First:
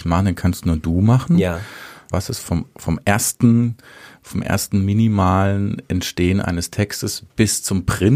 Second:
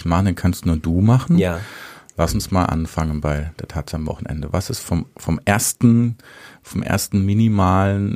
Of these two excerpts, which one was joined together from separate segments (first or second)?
first